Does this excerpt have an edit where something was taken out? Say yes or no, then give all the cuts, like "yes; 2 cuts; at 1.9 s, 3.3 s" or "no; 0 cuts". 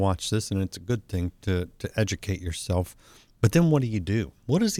no; 0 cuts